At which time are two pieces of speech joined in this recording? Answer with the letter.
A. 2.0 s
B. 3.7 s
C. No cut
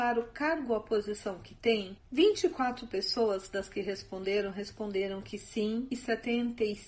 C